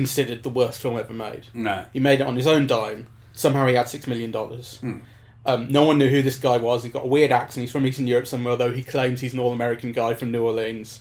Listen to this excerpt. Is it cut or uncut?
uncut